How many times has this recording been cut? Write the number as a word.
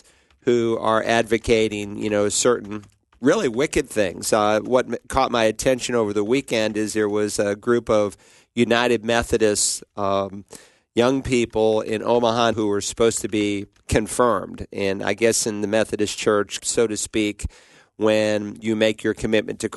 two